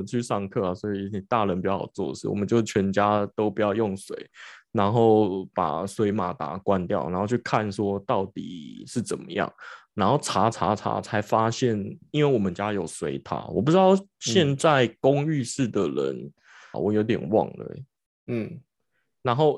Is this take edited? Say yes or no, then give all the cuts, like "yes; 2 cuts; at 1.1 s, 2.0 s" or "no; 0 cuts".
yes; 1 cut; at 16.7 s